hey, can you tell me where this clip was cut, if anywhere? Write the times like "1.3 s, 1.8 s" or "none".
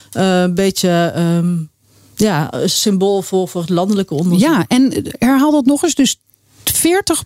none